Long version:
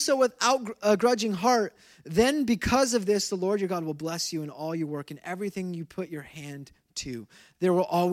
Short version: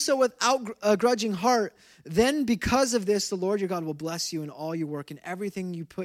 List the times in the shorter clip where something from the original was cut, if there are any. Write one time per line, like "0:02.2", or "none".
none

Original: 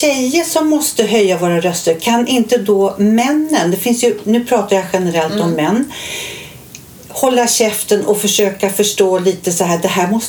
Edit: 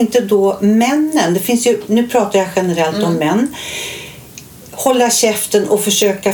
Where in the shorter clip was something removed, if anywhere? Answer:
none

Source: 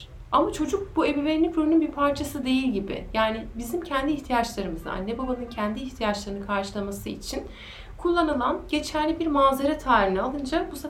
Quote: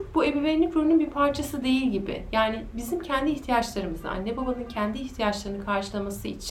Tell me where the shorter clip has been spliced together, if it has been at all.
none

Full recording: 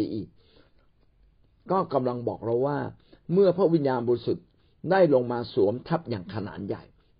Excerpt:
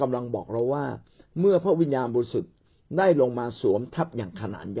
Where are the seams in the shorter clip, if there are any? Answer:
none

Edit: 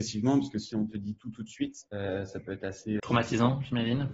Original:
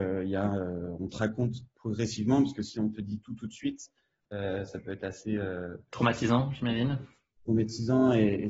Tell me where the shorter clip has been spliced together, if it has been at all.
0:01.9
0:03.0

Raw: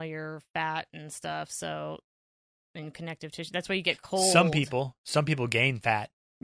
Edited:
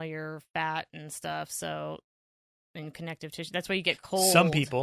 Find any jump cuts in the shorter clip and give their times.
none

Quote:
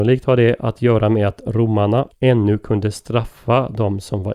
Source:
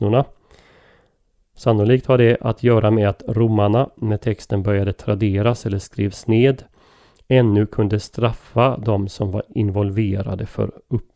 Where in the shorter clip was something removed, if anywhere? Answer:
0:02.1

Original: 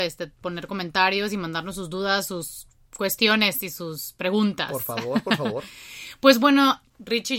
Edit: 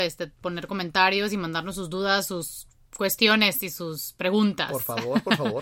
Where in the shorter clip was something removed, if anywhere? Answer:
none

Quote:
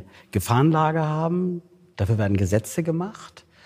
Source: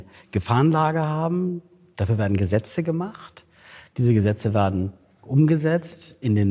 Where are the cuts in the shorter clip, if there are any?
none

